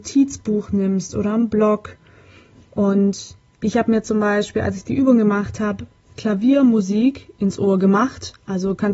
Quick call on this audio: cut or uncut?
uncut